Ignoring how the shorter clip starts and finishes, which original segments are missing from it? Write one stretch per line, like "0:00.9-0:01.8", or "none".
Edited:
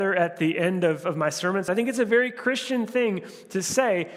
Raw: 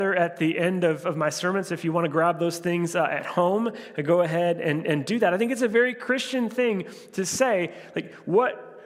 0:01.7-0:05.3

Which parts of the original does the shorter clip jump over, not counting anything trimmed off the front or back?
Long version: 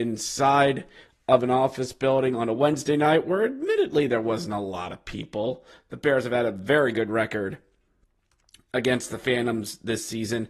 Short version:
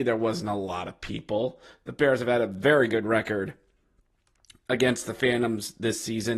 none

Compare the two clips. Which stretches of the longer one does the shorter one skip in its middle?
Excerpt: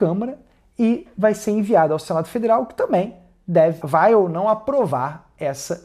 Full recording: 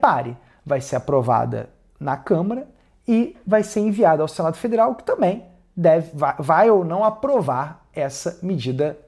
0:06.1-0:06.4

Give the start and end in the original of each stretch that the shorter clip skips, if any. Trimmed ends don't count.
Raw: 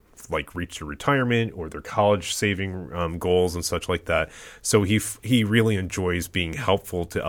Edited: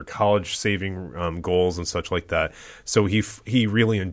none

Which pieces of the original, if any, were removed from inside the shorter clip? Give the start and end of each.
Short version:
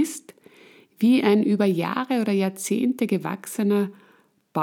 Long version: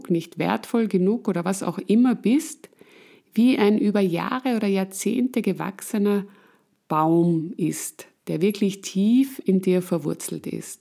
none

